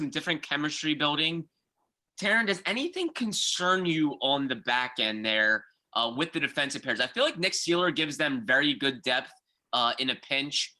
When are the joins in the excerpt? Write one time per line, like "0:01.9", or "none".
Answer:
none